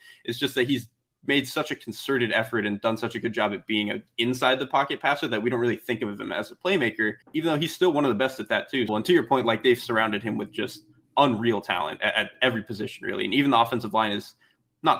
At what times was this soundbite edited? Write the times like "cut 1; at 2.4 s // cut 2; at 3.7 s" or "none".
cut 1; at 7.2 s // cut 2; at 8.9 s